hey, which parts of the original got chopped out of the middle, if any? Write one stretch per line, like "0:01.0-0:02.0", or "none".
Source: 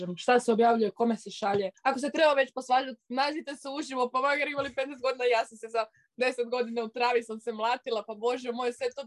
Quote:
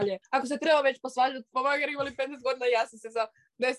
0:03.0-0:04.1

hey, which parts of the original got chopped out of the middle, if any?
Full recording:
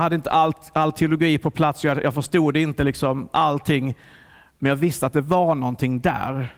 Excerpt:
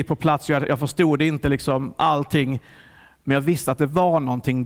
none

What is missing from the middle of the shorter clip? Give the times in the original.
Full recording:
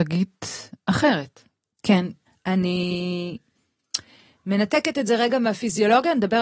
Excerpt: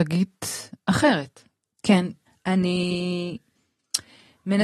none

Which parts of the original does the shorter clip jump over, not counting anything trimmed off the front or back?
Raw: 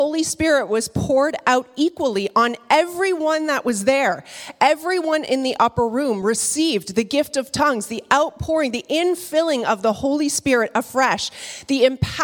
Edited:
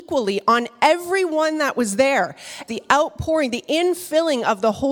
0:04.6-0:07.9

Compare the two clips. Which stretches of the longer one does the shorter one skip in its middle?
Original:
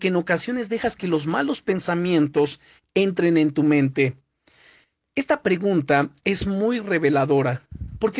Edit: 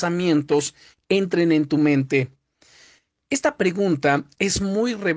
none

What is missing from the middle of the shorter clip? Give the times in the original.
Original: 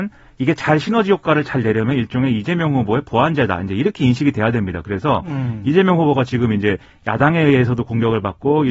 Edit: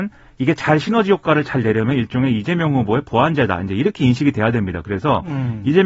none

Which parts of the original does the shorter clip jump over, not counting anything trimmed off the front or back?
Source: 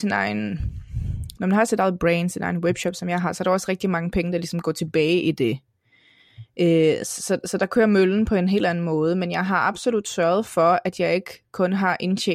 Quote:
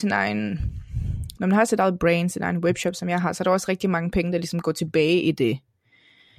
none

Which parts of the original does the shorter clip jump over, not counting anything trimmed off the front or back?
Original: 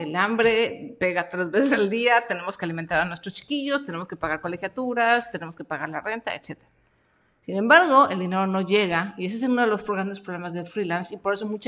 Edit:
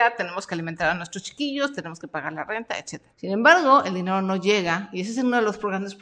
0:03.9-0:05.3
0:06.7-0:07.4

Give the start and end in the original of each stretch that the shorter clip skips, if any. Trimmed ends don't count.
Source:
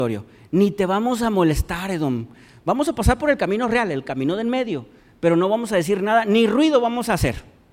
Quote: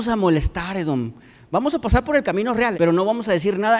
0:03.9-0:05.2

